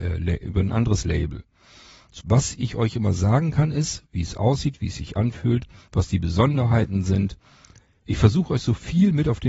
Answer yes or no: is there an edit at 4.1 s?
yes